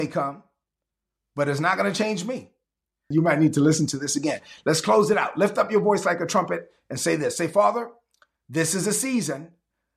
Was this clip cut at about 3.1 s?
yes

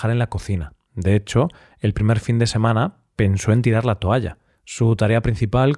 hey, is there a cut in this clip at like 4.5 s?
yes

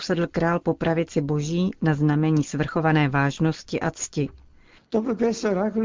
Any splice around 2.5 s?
no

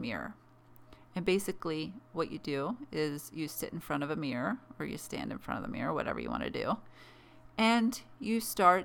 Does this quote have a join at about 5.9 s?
no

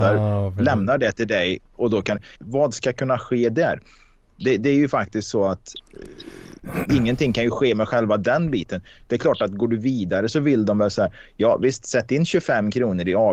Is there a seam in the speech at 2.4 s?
yes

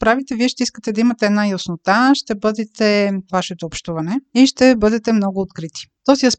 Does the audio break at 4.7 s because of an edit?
no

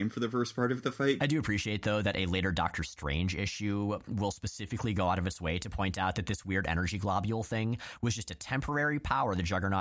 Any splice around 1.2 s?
yes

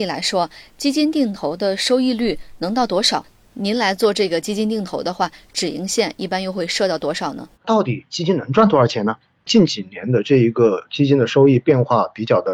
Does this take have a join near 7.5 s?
yes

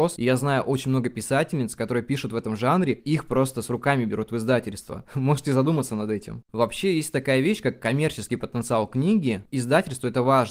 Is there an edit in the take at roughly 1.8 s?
no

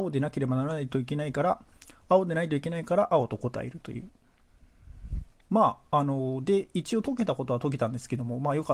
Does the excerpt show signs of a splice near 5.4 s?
yes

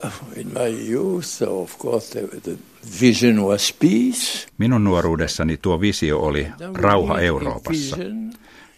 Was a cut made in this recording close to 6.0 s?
no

